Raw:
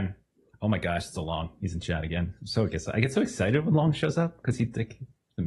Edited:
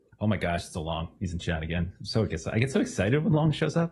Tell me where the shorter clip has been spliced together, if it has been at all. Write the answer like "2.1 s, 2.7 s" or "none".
none